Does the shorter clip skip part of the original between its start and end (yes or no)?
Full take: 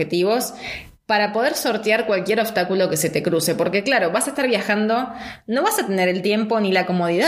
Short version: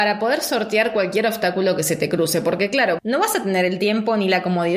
yes